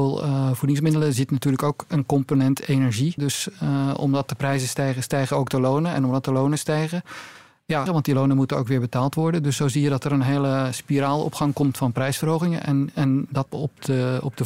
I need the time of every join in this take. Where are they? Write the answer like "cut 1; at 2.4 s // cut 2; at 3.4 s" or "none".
cut 1; at 3.2 s // cut 2; at 7.9 s // cut 3; at 13.5 s

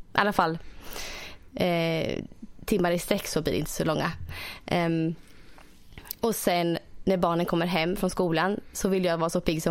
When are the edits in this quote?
none

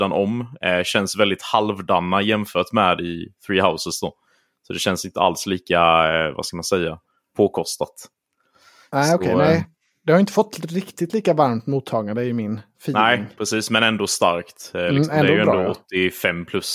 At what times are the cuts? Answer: none

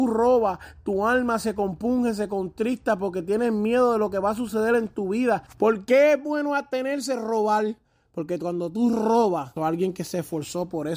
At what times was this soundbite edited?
cut 1; at 5.5 s // cut 2; at 9.6 s

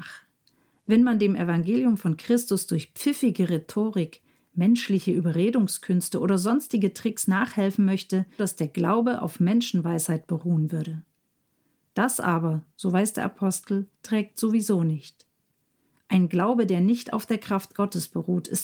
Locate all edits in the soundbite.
cut 1; at 8.4 s // cut 2; at 13.9 s

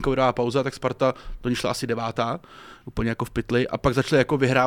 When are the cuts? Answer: none

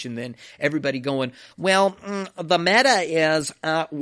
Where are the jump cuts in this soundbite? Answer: none

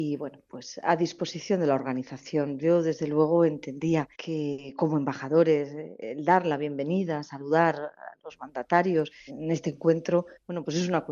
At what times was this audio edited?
cut 1; at 4.1 s // cut 2; at 9.3 s

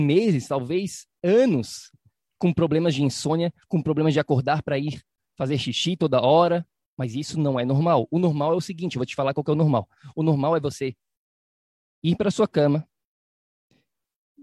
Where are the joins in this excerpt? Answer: none

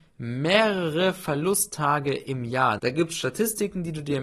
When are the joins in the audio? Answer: cut 1; at 2.8 s

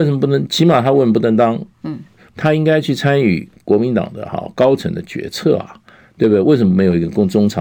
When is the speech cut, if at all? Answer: cut 1; at 2.3 s

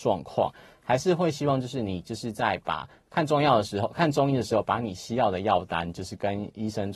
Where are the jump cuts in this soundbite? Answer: none

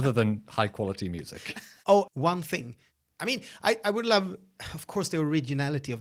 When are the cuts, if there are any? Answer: cut 1; at 2.1 s

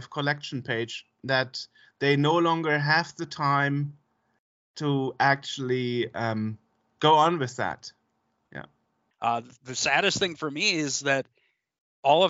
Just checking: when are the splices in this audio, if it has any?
cut 1; at 9.1 s

